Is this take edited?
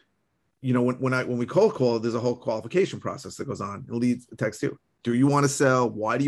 no; 0 cuts

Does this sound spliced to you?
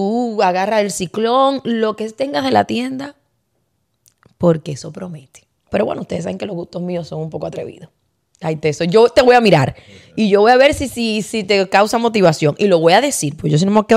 yes; 1 cut; at 5.7 s

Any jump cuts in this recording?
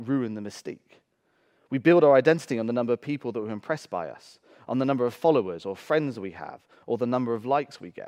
no; 0 cuts

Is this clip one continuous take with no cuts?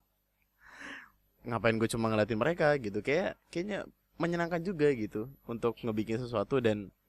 no; 1 cut; at 1.4 s

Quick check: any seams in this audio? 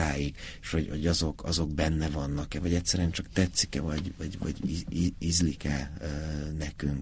no; 0 cuts

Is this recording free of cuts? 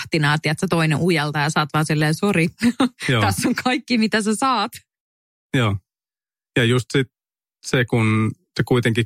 yes; 0 cuts

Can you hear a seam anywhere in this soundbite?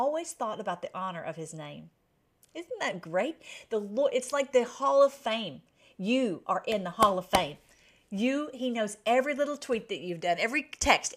no; 0 cuts

